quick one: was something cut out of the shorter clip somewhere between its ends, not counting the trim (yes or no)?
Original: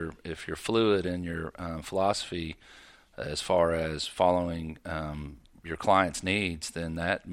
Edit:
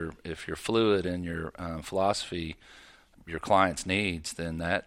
yes